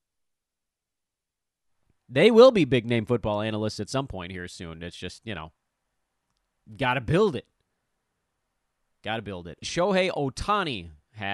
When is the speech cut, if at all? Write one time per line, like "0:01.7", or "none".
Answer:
0:09.6